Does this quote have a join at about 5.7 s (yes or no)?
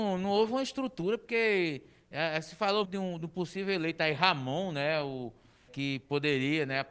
yes